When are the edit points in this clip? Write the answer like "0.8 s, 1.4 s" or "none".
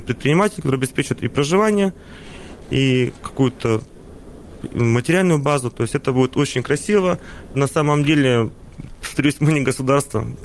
7.5 s